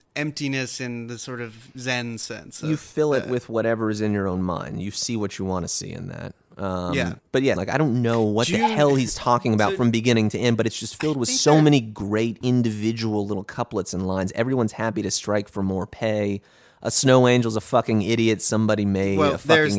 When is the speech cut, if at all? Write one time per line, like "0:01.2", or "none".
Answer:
0:07.6